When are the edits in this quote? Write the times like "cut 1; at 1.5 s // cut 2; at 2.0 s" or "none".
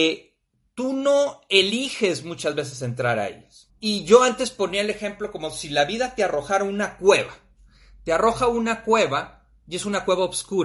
cut 1; at 3.7 s